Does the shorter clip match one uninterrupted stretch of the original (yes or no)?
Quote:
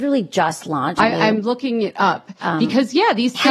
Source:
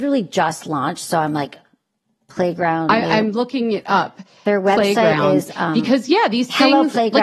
no